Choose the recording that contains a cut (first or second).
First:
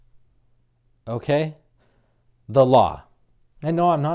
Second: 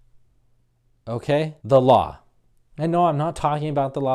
second